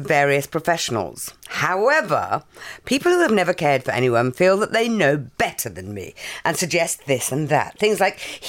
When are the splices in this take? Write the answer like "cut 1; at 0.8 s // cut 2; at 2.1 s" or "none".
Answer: cut 1; at 1.4 s